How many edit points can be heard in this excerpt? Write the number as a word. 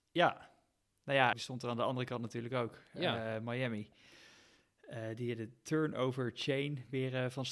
one